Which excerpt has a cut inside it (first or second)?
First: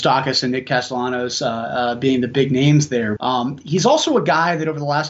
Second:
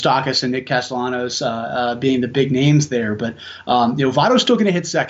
first